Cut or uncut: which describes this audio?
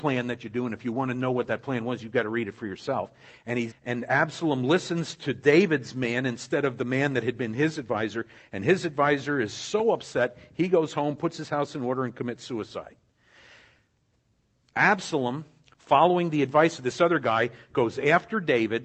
cut